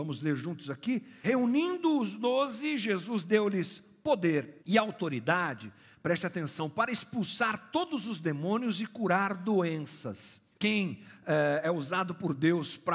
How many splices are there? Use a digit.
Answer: 3